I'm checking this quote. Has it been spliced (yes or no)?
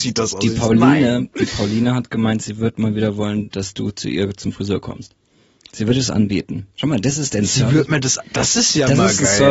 no